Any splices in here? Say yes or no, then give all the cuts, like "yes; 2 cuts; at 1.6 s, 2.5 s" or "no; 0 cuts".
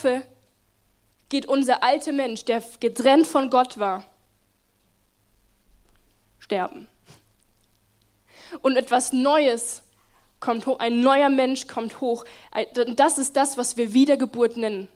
no; 0 cuts